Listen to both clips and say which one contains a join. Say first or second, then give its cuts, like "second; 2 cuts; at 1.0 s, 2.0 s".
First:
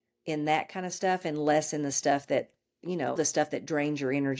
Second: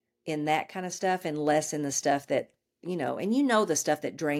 first; 1 cut; at 3.2 s